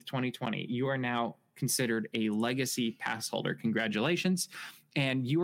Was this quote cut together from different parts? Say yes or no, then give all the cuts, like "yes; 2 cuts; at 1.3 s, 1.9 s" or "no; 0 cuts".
no; 0 cuts